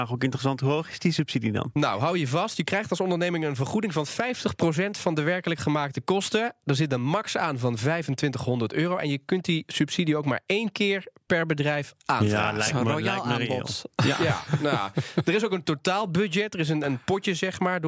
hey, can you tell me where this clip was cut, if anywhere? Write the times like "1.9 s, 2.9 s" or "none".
none